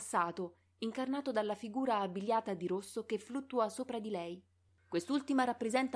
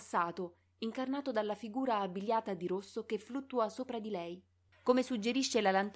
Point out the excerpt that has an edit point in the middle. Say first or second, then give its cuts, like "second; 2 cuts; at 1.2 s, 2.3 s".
second; 1 cut; at 4.7 s